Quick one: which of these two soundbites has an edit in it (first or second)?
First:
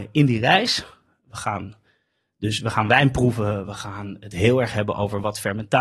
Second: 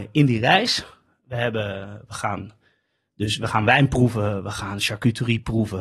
first